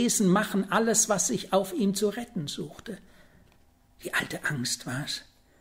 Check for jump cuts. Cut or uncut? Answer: uncut